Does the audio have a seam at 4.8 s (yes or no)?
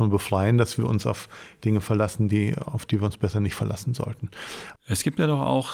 yes